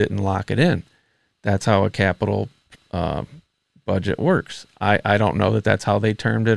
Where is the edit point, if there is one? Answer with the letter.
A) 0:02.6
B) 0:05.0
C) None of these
C